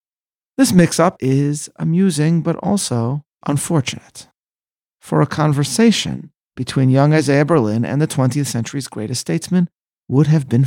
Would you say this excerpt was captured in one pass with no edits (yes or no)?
no